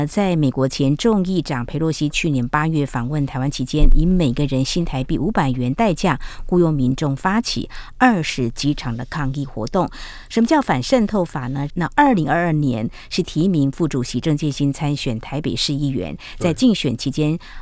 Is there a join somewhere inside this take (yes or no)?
yes